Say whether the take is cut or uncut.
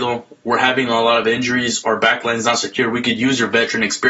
uncut